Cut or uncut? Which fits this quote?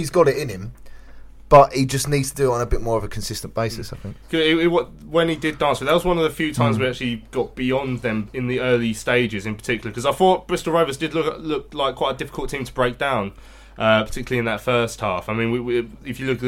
uncut